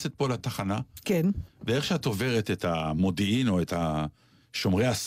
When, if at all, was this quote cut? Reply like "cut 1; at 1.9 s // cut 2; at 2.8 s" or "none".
none

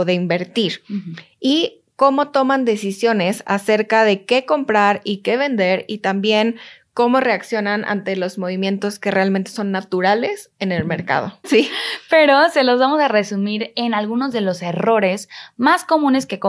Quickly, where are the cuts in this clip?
cut 1; at 11.4 s

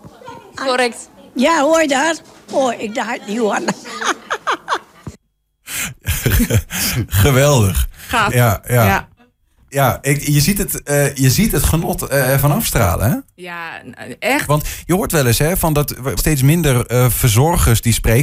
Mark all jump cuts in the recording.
cut 1; at 8.3 s // cut 2; at 14.5 s // cut 3; at 16.2 s

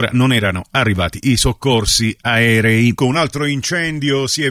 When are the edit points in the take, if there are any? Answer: cut 1; at 3.0 s

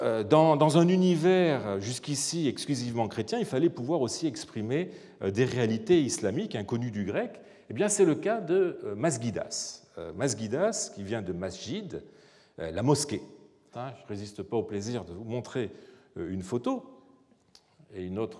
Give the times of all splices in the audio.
cut 1; at 13.7 s

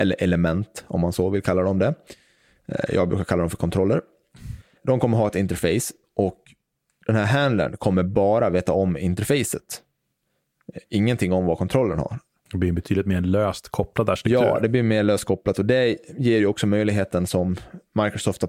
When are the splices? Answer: none

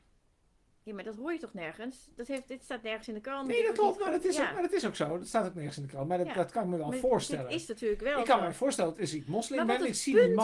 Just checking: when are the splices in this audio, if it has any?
none

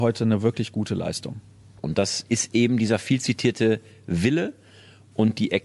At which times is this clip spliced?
cut 1; at 1.8 s

